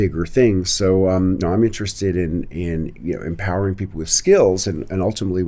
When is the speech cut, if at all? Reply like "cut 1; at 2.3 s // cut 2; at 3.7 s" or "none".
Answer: none